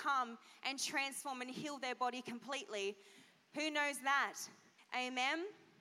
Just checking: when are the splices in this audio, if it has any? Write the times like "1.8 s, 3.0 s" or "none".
4.8 s